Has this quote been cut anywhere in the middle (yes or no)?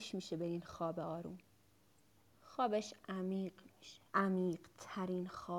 yes